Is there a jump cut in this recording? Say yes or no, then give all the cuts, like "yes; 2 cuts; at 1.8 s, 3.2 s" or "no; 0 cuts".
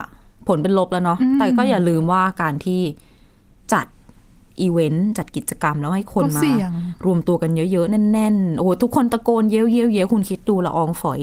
no; 0 cuts